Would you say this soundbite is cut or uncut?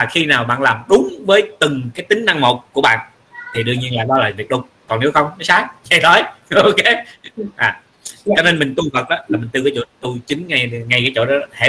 uncut